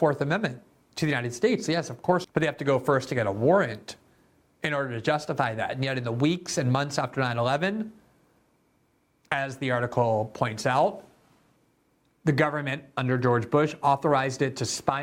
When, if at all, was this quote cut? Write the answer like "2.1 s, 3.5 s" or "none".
2.2 s